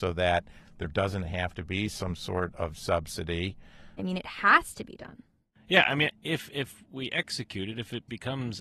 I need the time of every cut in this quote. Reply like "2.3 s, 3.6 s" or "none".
4.0 s, 6.1 s